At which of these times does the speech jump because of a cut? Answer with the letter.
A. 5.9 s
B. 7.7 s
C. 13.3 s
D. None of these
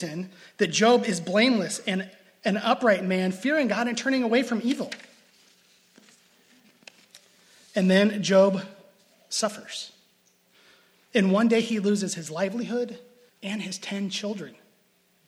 C